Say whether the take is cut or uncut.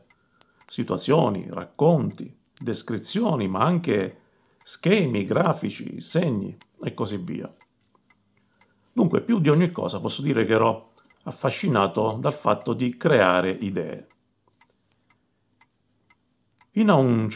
uncut